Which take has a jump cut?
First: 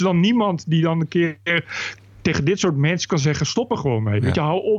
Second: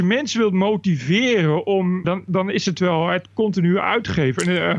second; 1 cut; at 2.0 s

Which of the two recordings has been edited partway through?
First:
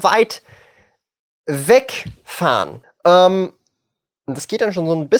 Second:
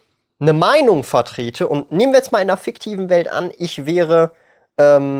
first; 1 cut; at 2.8 s

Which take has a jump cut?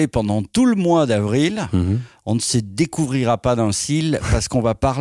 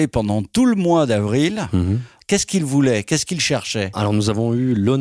second; 1 cut; at 2.2 s

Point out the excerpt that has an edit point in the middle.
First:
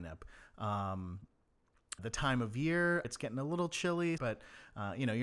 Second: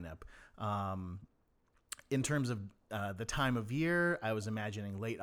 first; 3 cuts; at 2.0 s, 3.0 s, 4.2 s

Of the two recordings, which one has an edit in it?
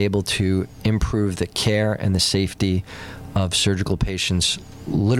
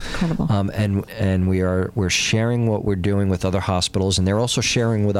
second; 1 cut; at 1.1 s

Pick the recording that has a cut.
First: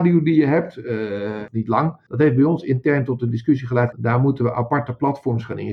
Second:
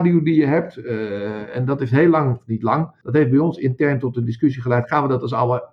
first; 2 cuts; at 1.5 s, 3.9 s

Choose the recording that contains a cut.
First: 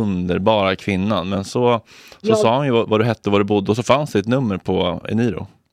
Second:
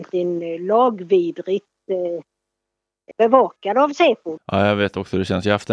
second; 2 cuts; at 3.1 s, 4.4 s

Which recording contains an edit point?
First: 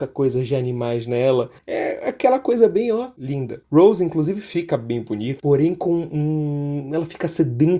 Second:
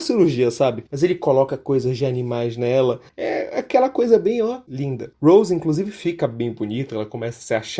first; 1 cut; at 5.4 s

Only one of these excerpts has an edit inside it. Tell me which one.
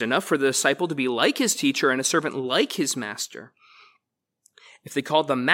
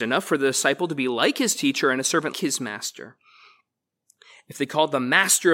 second; 1 cut; at 2.3 s

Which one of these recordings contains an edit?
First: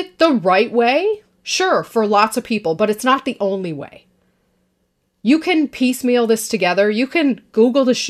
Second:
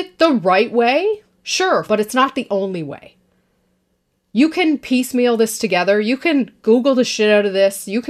second; 1 cut; at 1.9 s

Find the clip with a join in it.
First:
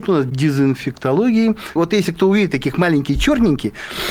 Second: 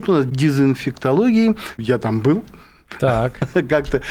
first; 1 cut; at 1.8 s

